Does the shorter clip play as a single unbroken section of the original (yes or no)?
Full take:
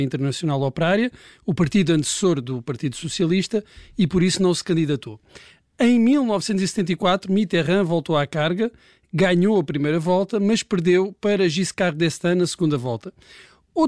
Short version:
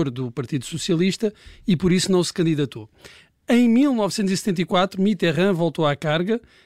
yes